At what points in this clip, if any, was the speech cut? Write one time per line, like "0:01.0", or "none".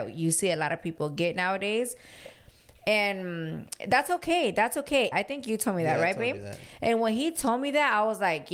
0:05.1